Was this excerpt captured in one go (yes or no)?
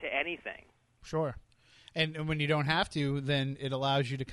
yes